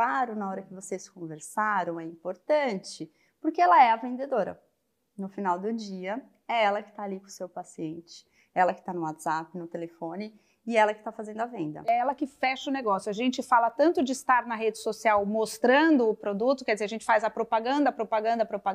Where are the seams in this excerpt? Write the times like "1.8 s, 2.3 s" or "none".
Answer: none